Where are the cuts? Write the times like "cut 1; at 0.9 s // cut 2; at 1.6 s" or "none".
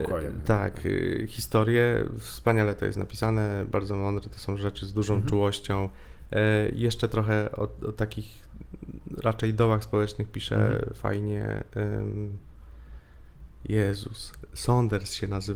none